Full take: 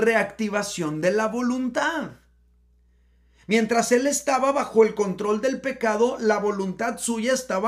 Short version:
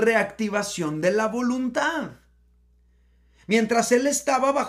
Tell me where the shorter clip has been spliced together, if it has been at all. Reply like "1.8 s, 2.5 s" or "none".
none